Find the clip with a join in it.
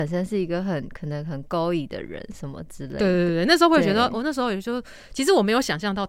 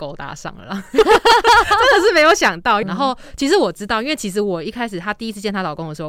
second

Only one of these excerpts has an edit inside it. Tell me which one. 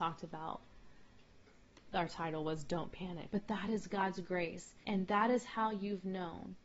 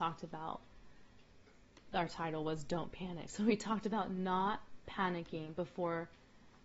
first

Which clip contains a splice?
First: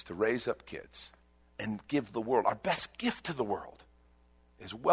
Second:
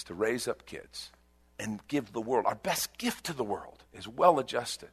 second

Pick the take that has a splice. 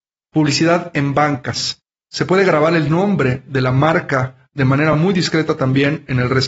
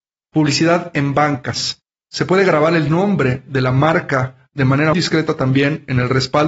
second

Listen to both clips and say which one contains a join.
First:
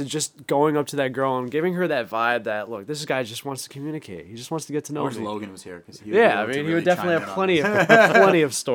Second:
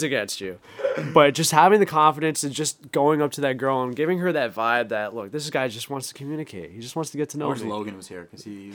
first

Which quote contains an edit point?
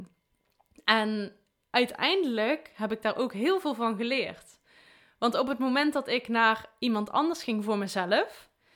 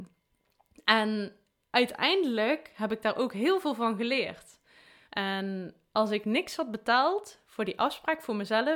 second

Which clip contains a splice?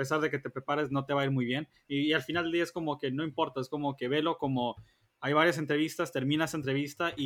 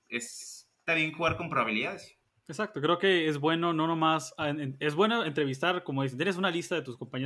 second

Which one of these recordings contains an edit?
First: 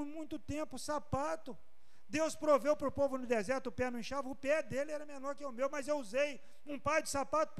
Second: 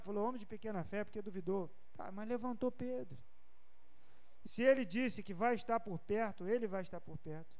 second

